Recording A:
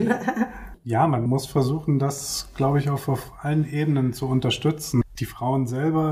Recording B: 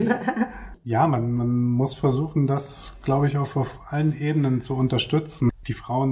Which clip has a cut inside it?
A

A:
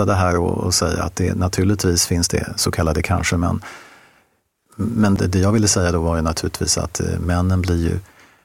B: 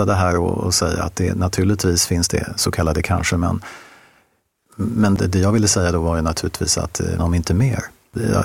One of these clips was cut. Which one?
B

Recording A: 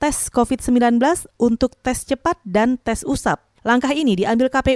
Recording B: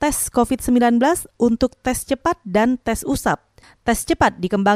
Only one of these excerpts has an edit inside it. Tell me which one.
A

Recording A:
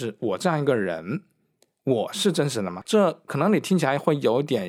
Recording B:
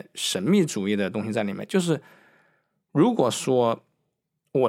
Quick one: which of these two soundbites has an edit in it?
A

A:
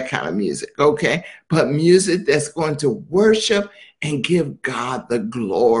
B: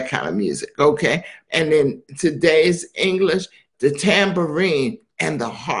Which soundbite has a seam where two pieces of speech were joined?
B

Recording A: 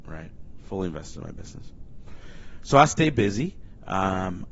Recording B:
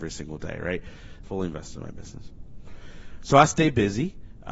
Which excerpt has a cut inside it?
B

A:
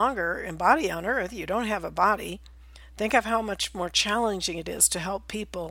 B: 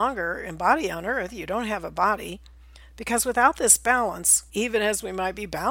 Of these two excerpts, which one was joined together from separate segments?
B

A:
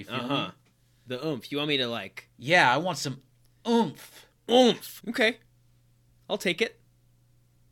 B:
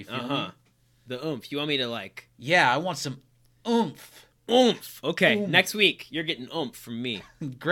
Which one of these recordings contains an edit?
A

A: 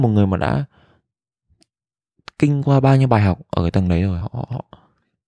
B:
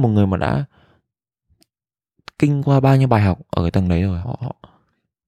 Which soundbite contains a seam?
B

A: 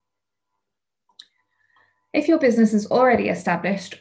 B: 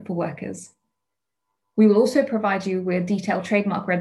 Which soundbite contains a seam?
B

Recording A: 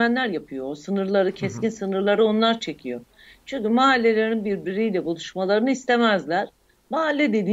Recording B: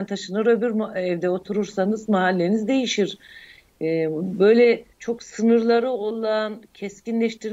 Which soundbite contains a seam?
B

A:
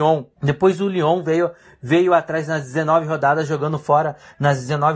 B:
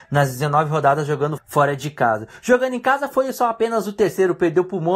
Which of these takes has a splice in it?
B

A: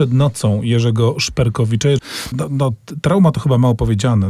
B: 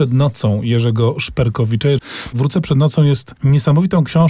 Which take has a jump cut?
A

